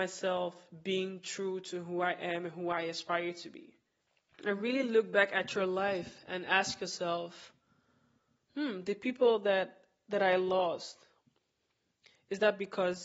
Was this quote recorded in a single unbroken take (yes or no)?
yes